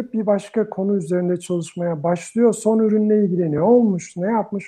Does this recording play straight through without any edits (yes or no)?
yes